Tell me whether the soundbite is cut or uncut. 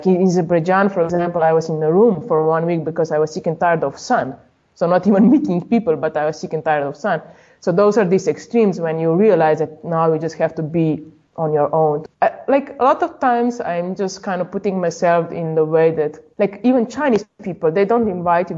uncut